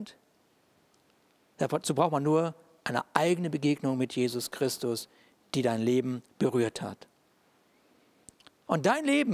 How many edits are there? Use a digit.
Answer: 1